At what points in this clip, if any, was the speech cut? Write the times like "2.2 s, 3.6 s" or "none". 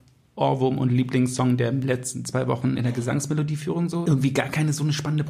2.8 s, 4.0 s